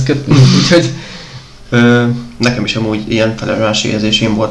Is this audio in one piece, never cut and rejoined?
no; 1 cut; at 1.7 s

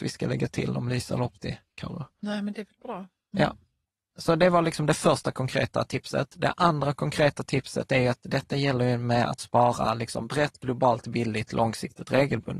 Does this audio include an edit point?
no; 0 cuts

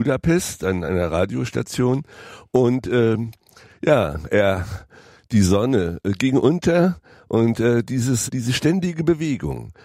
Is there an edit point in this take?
yes; 1 cut; at 8.3 s

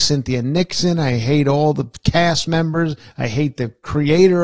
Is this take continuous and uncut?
yes; 0 cuts

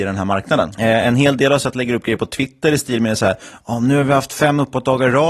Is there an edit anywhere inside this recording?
no; 0 cuts

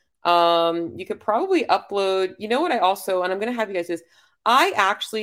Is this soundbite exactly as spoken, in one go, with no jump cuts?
yes; 0 cuts

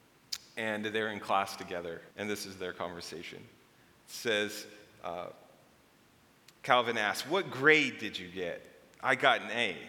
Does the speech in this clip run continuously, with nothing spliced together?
no; 1 cut; at 2.1 s

